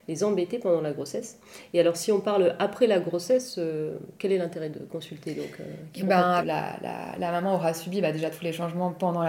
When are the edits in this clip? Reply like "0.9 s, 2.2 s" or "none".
6.4 s